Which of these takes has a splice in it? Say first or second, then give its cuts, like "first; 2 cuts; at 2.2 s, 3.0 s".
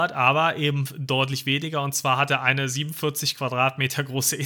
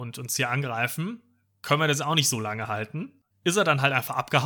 second; 1 cut; at 3.3 s